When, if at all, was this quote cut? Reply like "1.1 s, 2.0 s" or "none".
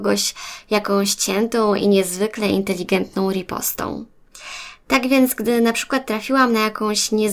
none